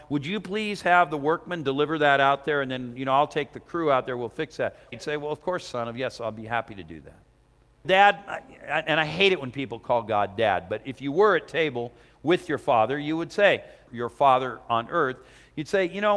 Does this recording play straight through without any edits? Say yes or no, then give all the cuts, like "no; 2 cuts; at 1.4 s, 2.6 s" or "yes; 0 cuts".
no; 3 cuts; at 4.9 s, 7.8 s, 13.9 s